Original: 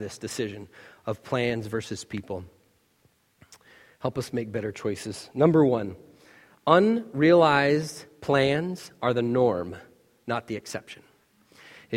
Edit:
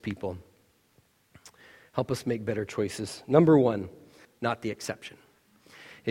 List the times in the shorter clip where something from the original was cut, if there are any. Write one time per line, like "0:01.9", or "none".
0:04.3